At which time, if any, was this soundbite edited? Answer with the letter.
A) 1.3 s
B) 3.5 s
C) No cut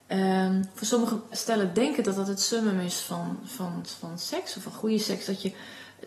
A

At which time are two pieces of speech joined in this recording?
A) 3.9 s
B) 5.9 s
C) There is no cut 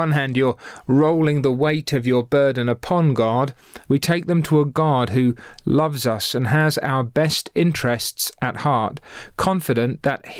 A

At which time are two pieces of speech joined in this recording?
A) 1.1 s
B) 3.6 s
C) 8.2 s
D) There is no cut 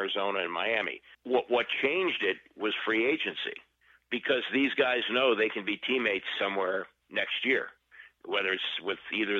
A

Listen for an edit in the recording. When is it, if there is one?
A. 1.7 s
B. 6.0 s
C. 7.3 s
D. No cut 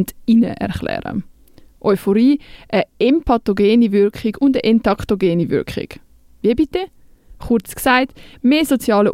D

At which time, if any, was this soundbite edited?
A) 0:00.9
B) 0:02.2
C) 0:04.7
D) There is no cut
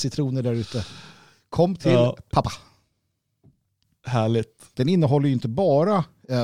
C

